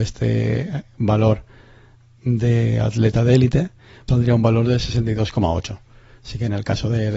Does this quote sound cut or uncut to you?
cut